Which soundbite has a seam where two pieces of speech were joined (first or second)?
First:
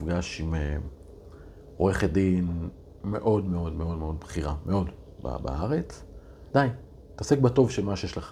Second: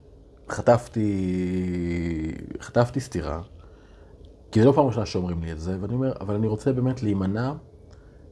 first